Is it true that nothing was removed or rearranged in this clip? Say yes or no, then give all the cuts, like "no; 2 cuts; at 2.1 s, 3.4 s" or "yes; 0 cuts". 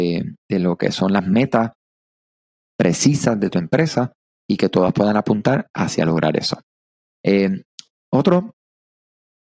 yes; 0 cuts